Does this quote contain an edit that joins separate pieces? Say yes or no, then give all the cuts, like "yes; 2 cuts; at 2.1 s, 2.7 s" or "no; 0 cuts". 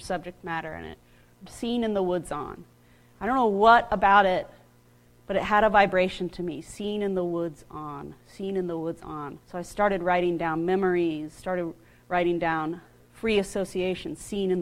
yes; 2 cuts; at 1.5 s, 9.4 s